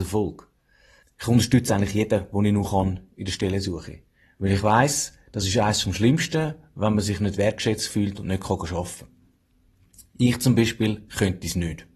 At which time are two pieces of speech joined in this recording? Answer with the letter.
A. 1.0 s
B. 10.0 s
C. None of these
A